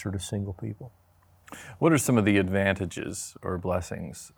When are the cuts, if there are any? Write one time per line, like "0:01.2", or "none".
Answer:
none